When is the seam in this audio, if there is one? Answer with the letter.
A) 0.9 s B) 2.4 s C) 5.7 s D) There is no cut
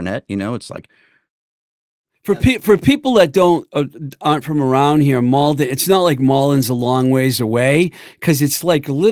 D